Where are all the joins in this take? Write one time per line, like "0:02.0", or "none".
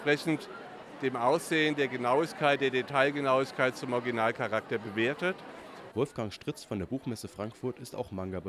0:05.9